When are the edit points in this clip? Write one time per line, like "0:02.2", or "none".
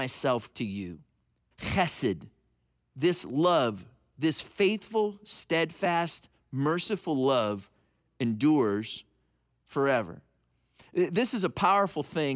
0:01.5